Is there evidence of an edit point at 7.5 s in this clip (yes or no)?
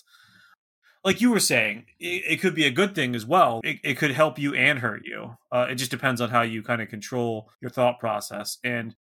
yes